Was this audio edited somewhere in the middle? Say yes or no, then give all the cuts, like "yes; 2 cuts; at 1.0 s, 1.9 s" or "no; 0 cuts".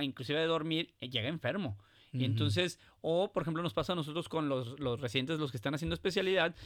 no; 0 cuts